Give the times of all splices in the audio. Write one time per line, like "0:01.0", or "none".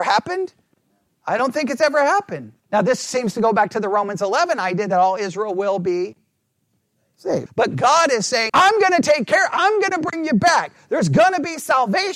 0:02.6
0:07.5
0:08.5